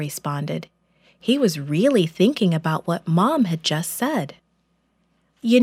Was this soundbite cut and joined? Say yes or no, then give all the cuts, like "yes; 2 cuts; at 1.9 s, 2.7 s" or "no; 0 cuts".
no; 0 cuts